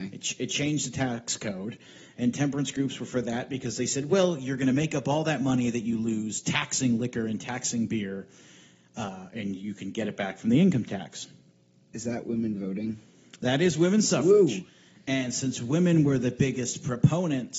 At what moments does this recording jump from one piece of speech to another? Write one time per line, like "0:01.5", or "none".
0:11.9